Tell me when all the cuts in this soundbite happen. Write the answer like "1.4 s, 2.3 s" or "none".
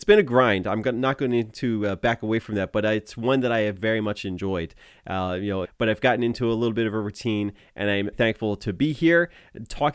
5.6 s, 8.1 s